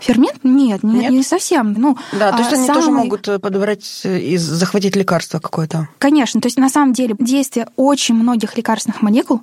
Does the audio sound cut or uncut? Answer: cut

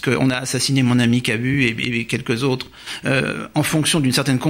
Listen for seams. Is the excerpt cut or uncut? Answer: uncut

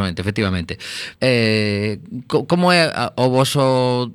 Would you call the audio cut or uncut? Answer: cut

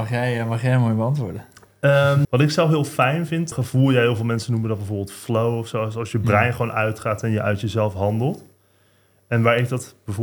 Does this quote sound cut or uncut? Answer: cut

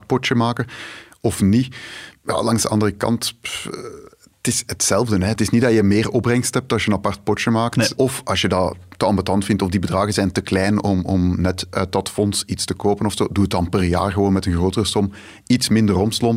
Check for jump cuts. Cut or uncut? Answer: cut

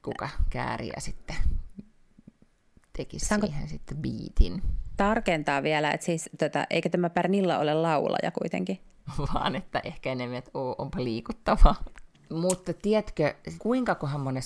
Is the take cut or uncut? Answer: cut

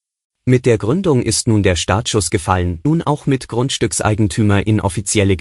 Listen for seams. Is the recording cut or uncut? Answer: cut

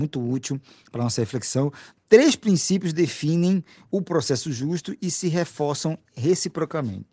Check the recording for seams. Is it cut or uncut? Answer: cut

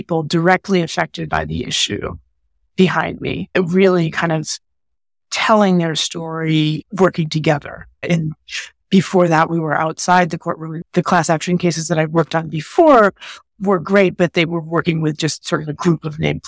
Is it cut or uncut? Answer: cut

